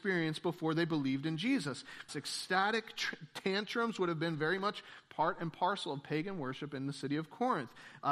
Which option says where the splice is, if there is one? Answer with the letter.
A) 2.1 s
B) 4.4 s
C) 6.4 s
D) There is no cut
A